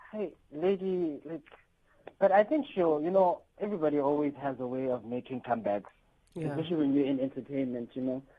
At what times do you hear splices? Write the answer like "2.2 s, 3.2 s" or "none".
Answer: none